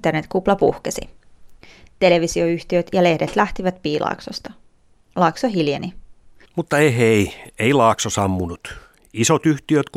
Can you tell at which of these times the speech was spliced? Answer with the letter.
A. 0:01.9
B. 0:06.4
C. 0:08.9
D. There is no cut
B